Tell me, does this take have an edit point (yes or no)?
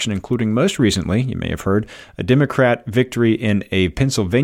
no